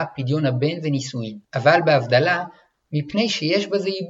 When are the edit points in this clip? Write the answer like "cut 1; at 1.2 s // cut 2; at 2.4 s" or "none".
cut 1; at 1.4 s // cut 2; at 2.7 s